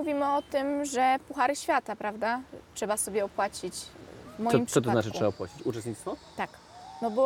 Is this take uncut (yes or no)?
yes